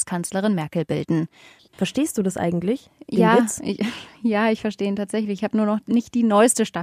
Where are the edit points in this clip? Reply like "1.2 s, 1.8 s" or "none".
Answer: 1.6 s